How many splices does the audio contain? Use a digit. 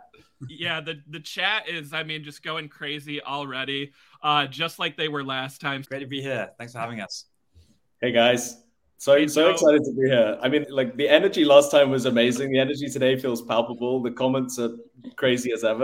2